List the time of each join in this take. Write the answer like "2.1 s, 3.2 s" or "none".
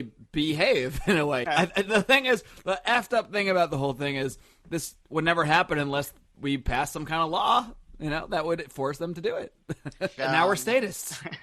1.4 s, 10.2 s